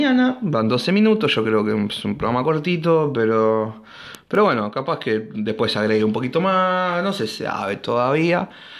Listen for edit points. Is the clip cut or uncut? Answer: uncut